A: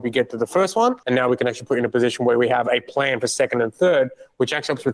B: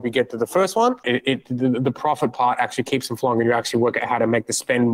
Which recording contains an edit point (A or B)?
B